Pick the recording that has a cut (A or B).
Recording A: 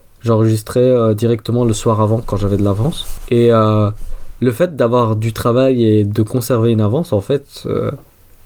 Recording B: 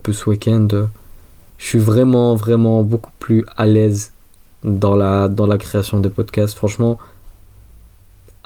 B